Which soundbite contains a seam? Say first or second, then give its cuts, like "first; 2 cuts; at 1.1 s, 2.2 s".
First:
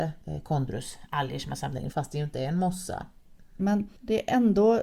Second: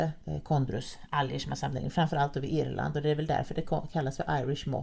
first; 2 cuts; at 1.9 s, 3.6 s